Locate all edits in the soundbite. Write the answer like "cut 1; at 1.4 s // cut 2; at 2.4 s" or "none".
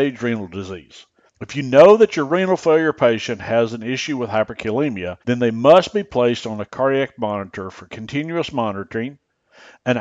cut 1; at 1.3 s // cut 2; at 5.2 s